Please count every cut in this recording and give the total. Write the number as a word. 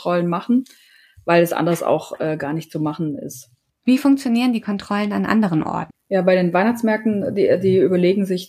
one